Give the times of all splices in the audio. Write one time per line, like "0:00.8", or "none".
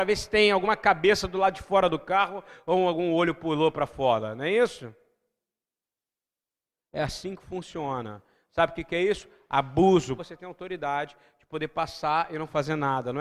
0:10.2